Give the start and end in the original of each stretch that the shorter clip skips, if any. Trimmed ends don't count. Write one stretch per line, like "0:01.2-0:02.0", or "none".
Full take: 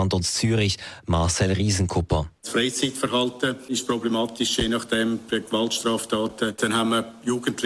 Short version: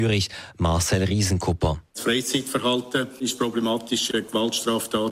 0:04.6-0:05.3